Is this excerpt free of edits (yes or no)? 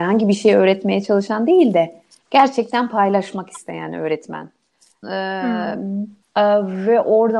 no